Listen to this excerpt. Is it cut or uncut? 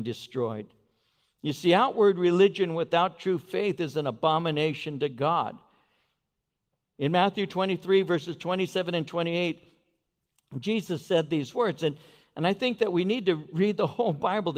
uncut